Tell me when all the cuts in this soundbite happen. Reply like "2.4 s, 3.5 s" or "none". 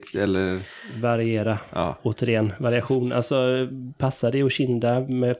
none